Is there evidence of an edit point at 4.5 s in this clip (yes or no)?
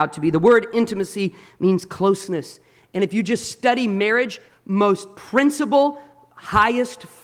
yes